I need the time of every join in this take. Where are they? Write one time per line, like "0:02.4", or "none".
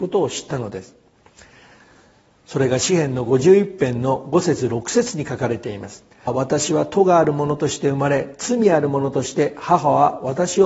0:06.3